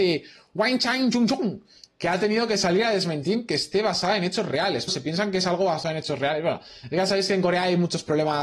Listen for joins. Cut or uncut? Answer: cut